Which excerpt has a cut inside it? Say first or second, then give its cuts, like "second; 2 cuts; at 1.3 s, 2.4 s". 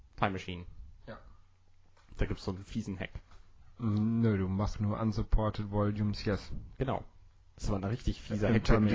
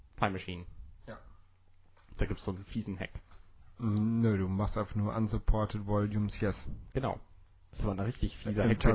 first; 1 cut; at 4.7 s